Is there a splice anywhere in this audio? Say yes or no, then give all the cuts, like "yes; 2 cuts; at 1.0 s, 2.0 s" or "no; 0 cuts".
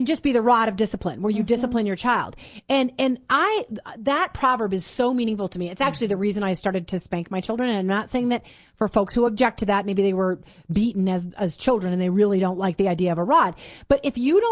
no; 0 cuts